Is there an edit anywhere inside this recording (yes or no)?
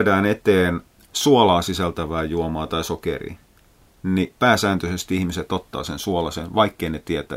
no